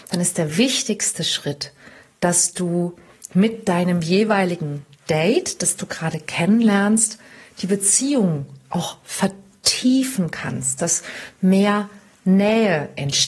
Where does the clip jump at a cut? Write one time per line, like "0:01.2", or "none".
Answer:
none

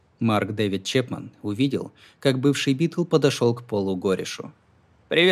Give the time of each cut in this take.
none

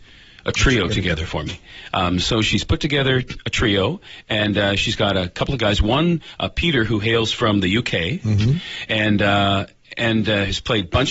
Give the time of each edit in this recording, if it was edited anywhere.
none

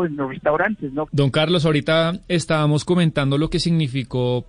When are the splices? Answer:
0:01.1

